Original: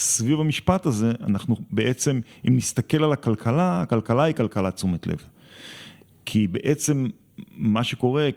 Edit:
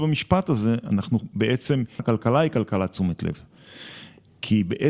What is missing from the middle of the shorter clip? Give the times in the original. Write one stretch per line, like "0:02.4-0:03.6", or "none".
0:02.4-0:03.8